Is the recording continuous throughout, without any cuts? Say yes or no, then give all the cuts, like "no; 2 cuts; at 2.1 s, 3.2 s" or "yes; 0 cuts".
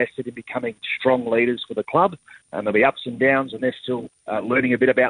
yes; 0 cuts